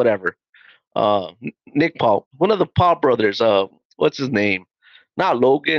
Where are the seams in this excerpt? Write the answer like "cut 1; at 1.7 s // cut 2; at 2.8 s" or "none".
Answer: cut 1; at 2.3 s